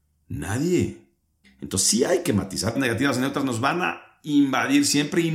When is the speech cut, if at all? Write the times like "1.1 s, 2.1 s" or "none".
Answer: 1.4 s, 2.8 s